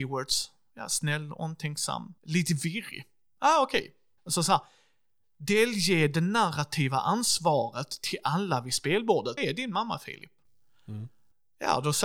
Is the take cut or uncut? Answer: cut